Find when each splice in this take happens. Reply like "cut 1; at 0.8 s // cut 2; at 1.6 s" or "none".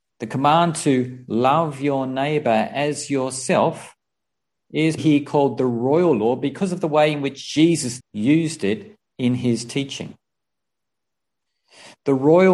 cut 1; at 5.0 s // cut 2; at 8.0 s